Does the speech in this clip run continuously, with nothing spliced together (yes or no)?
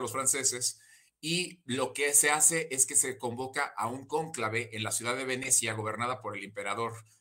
yes